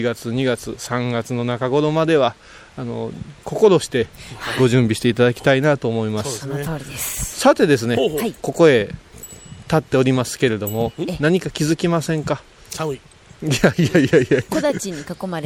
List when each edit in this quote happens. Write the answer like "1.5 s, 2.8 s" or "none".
8.4 s